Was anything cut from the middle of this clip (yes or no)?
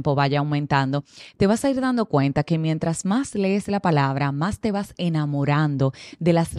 no